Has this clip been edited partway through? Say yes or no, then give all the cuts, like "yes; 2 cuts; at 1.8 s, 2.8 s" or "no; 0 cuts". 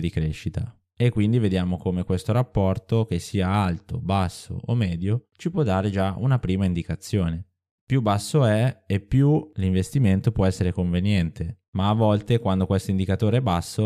no; 0 cuts